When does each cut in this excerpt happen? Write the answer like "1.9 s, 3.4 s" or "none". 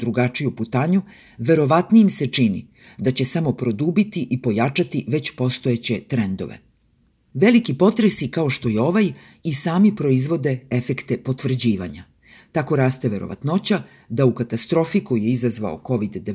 none